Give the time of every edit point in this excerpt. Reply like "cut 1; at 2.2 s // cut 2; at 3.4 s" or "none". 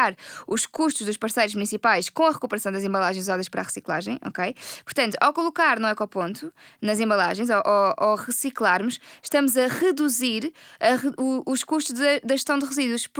none